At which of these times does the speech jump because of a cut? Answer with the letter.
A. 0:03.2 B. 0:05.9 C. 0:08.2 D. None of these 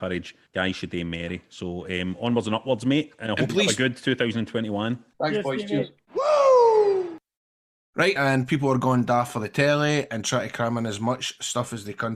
C